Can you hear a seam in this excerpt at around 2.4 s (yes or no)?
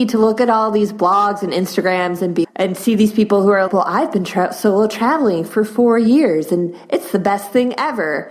yes